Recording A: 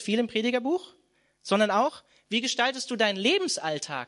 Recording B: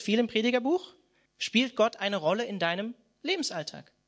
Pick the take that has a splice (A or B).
B